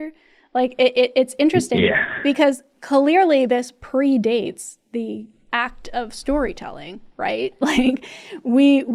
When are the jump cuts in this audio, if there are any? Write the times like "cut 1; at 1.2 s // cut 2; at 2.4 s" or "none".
none

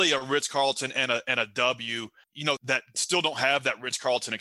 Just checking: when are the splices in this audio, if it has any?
cut 1; at 2.6 s

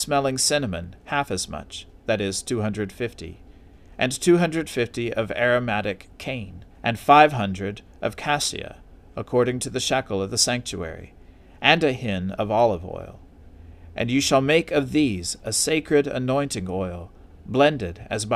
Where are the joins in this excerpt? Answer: cut 1; at 6.7 s

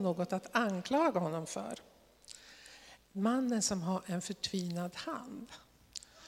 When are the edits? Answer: cut 1; at 3.0 s

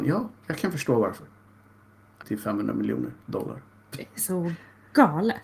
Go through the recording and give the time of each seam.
cut 1; at 2.2 s

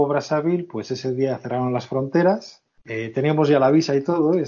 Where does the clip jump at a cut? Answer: none

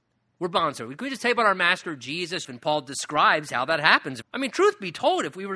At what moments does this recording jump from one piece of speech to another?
cut 1; at 2.4 s // cut 2; at 4.2 s

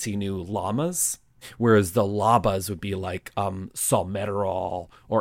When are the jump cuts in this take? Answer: none

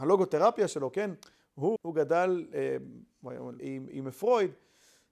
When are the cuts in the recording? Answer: cut 1; at 1.8 s // cut 2; at 3.6 s

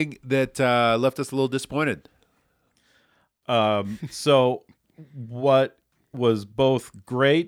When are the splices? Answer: cut 1; at 3.4 s

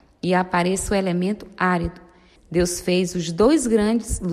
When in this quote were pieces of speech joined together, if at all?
cut 1; at 2.4 s

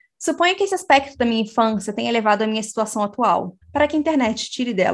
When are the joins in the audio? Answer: cut 1; at 3.6 s

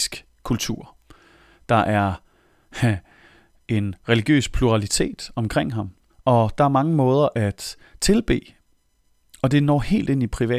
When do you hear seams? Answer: cut 1; at 6.1 s

